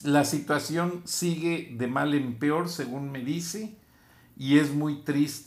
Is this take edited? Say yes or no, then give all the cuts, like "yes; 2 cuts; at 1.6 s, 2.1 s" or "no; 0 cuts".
no; 0 cuts